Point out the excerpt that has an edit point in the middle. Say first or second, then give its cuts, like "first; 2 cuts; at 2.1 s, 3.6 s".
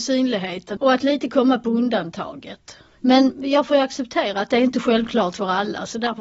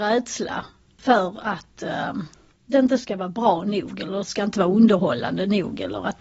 first; 1 cut; at 3.0 s